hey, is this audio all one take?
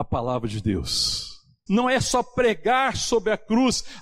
no; 1 cut; at 1.7 s

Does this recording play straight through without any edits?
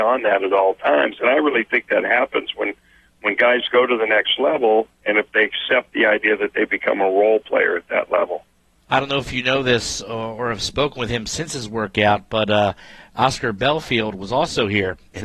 yes; 0 cuts

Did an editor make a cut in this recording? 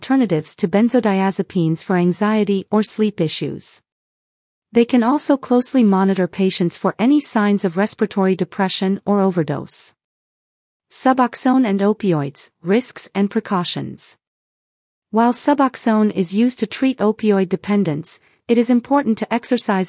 no; 0 cuts

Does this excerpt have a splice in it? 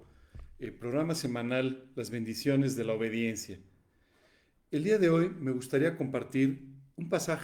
no; 0 cuts

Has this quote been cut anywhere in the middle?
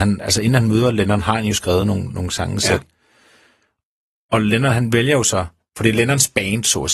no; 0 cuts

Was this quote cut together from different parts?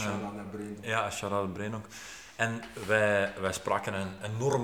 no; 0 cuts

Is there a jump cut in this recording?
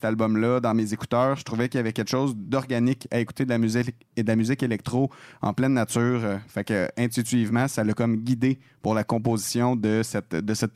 no; 0 cuts

